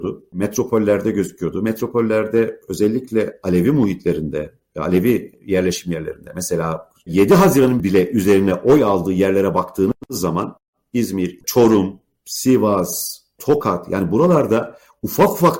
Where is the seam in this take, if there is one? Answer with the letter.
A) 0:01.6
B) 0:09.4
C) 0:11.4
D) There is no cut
D